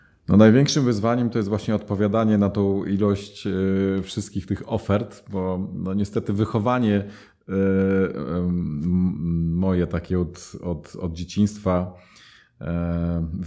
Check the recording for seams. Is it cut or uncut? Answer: uncut